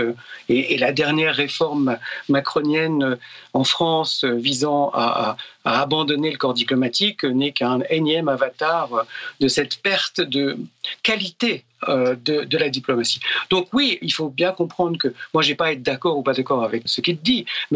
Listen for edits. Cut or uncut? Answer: cut